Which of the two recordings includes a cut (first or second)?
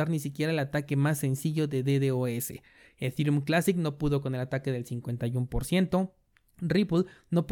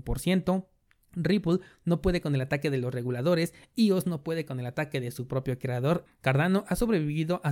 second